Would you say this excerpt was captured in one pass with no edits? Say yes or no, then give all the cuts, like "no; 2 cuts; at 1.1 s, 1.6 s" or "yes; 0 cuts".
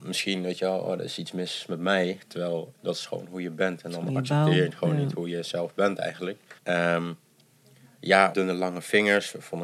no; 3 cuts; at 2.7 s, 6.6 s, 8.3 s